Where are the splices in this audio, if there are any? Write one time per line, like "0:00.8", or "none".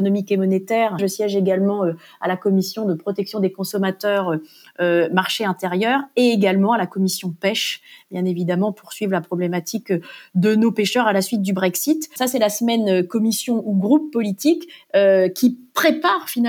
0:01.0